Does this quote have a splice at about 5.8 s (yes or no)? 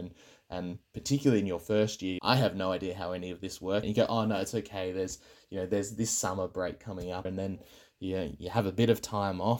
no